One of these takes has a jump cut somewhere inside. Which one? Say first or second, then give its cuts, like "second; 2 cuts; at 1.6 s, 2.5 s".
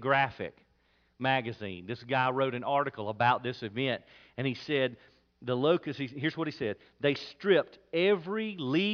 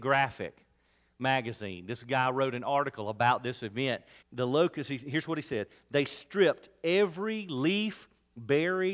second; 1 cut; at 4.2 s